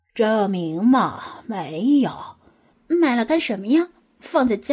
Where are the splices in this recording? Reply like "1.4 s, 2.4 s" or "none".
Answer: 2.7 s